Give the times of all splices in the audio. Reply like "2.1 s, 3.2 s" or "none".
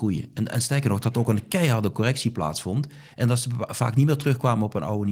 none